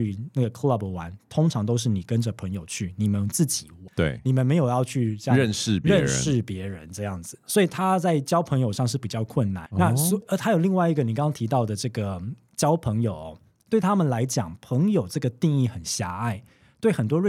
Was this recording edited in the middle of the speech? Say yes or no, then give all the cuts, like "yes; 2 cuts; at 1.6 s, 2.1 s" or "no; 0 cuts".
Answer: yes; 1 cut; at 9.7 s